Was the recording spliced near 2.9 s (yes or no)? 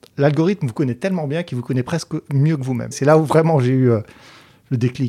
yes